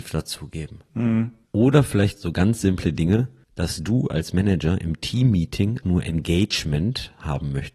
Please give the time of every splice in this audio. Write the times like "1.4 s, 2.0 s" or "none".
1.5 s, 5.8 s